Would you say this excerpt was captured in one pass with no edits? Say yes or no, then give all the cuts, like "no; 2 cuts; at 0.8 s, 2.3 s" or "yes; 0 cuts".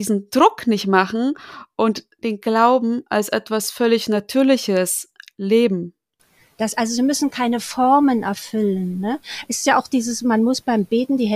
yes; 0 cuts